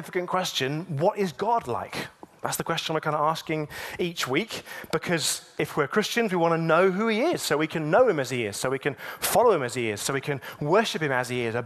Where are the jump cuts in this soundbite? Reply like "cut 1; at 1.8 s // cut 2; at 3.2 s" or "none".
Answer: none